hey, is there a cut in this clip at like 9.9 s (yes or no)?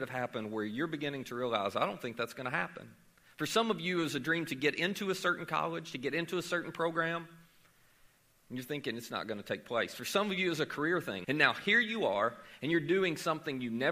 no